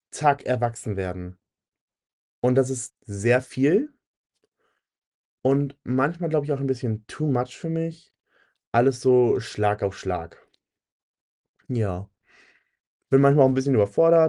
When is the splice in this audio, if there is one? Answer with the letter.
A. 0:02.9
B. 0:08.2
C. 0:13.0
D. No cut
A